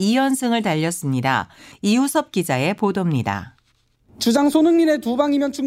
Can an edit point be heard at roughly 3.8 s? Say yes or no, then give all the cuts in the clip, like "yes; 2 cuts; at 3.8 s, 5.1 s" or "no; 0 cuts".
no; 1 cut; at 1.7 s